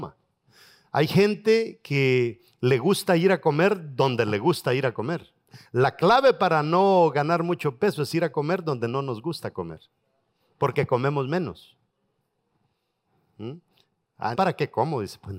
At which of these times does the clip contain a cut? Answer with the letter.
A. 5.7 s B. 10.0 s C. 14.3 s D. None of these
C